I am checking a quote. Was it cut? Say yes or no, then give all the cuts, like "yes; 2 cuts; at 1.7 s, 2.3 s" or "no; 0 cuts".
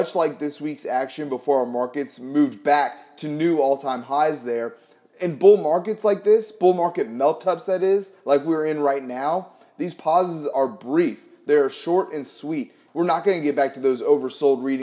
yes; 1 cut; at 12.9 s